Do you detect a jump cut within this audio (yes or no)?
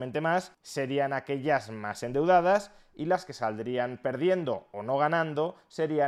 no